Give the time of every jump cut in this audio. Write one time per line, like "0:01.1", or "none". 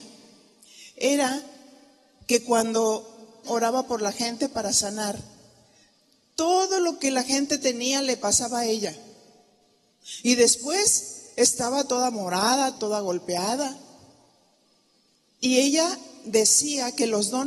0:03.4
0:12.8
0:15.3